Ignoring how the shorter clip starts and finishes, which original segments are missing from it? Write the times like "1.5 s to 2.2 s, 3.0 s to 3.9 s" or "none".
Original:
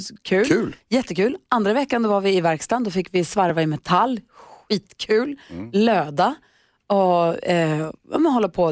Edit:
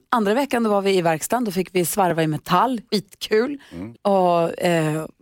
4.3 s to 4.6 s, 5.7 s to 6.8 s